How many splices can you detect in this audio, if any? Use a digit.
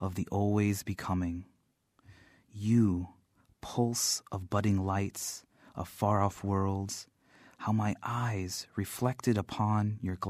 0